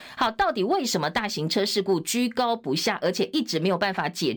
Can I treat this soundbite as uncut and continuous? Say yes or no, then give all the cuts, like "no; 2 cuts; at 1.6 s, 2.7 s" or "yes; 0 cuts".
yes; 0 cuts